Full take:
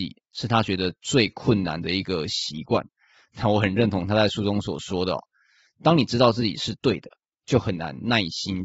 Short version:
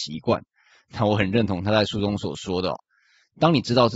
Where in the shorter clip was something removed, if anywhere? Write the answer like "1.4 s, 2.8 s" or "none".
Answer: none